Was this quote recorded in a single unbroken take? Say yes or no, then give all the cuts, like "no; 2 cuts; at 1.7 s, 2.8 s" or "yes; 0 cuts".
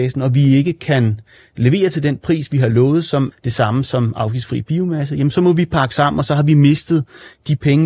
no; 1 cut; at 3.3 s